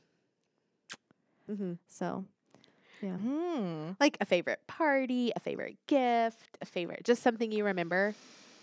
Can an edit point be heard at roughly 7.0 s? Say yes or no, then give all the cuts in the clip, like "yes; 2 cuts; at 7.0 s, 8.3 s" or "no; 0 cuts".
no; 2 cuts; at 1.5 s, 3.2 s